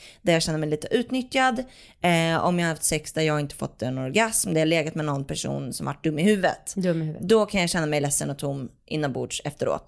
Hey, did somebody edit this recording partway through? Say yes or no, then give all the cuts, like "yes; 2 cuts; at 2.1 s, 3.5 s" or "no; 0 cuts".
no; 0 cuts